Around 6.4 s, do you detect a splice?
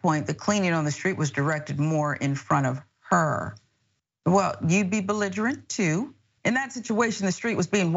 yes; 1 cut; at 6.4 s

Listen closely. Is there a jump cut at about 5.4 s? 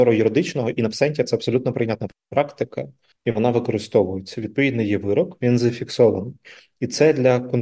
yes; 1 cut; at 5.4 s

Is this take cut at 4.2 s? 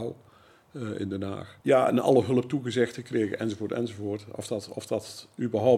no; 1 cut; at 1.6 s

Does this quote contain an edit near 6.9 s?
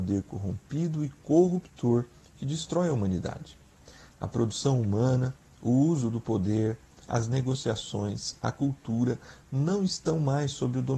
no; 0 cuts

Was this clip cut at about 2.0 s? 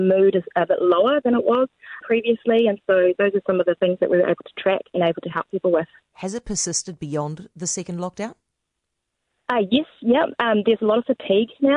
yes; 1 cut; at 2.0 s

